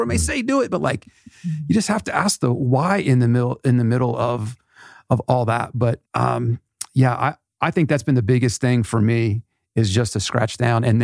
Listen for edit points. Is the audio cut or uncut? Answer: cut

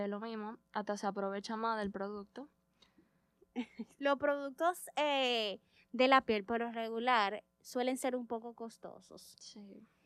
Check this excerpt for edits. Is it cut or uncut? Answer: cut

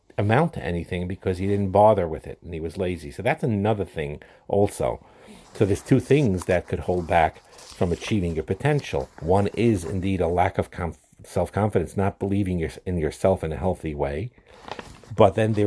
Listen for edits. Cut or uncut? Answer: cut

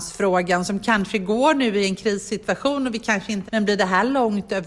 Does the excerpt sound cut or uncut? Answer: cut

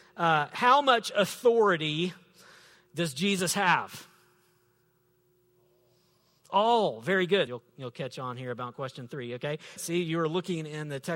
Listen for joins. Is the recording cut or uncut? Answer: cut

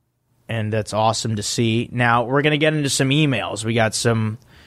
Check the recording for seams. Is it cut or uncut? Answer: uncut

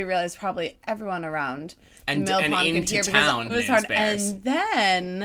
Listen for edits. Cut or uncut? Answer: cut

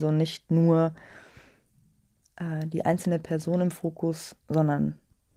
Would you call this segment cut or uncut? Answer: uncut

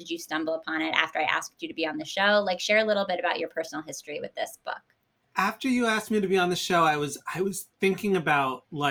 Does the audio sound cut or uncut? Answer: uncut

